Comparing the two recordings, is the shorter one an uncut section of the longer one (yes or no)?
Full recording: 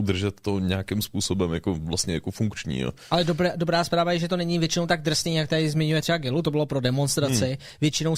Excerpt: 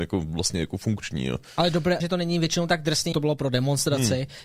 no